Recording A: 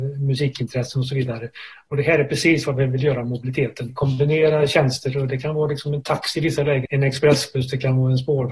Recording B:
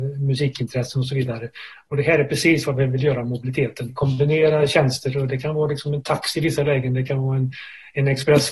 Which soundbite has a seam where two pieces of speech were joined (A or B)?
A